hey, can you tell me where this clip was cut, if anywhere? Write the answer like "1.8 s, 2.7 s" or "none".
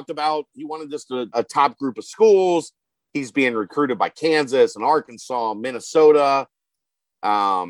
1.3 s